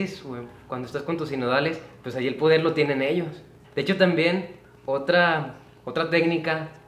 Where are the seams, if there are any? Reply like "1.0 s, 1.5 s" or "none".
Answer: 3.6 s